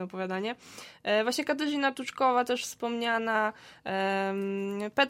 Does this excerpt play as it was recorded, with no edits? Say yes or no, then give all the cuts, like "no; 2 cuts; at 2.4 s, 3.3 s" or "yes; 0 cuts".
yes; 0 cuts